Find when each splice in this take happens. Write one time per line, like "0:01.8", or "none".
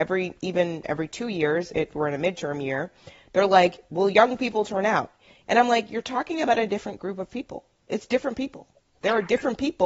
none